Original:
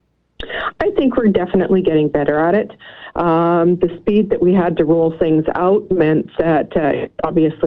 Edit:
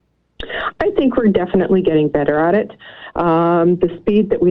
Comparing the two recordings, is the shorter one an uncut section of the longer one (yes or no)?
yes